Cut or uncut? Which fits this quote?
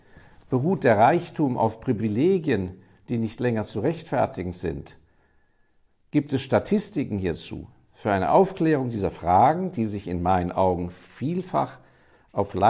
uncut